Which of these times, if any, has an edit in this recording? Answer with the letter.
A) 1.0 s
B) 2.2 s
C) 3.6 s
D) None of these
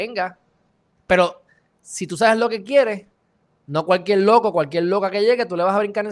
A